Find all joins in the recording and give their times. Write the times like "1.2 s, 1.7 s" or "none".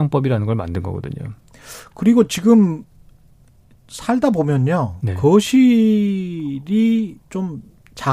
none